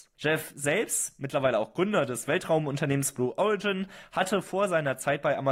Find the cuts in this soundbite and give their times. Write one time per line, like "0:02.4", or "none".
none